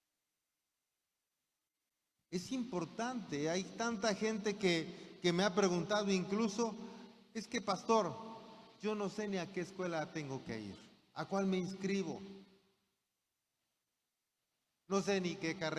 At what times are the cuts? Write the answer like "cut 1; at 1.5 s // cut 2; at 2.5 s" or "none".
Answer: none

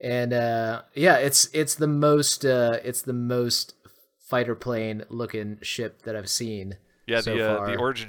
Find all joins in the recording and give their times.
none

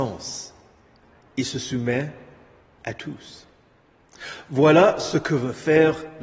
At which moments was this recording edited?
none

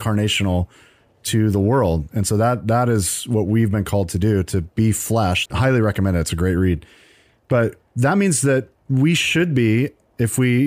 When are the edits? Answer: cut 1; at 5.5 s

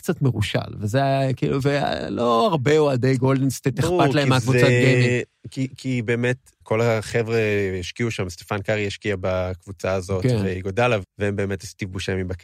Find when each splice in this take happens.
cut 1; at 6.6 s // cut 2; at 11.0 s

